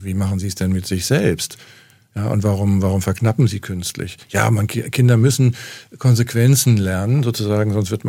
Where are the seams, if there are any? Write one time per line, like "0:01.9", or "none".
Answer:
none